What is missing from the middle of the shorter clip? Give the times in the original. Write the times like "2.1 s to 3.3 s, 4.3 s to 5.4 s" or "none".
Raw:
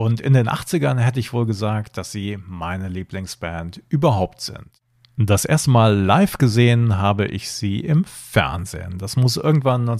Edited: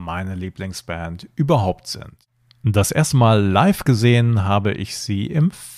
none